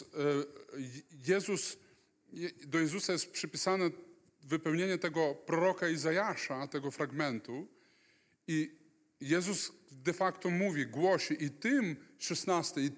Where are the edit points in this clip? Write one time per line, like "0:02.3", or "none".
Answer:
none